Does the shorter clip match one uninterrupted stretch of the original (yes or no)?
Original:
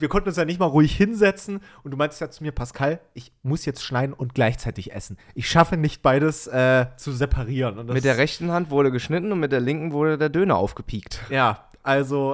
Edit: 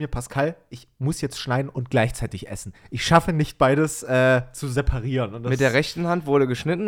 yes